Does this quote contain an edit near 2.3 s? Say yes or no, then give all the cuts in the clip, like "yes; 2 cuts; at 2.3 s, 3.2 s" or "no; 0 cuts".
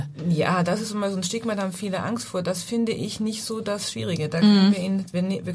no; 0 cuts